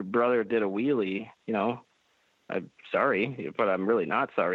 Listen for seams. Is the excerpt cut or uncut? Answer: cut